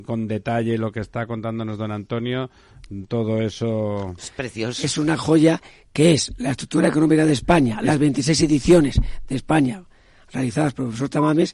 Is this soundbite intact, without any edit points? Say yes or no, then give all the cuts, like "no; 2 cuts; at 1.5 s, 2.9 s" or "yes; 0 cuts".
no; 1 cut; at 4.2 s